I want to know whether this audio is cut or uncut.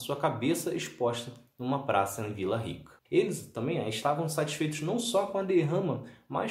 cut